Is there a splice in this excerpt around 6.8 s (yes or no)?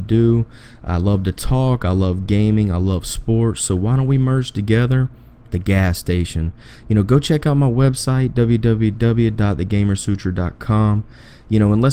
no